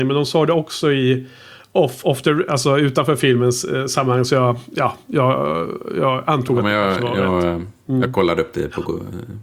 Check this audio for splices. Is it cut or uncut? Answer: uncut